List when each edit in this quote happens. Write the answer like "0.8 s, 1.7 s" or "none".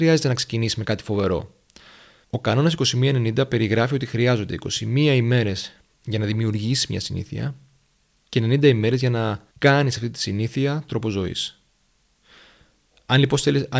2.2 s, 9.5 s